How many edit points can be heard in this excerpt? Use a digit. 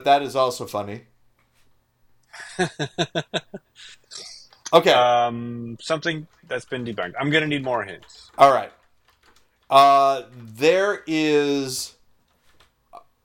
0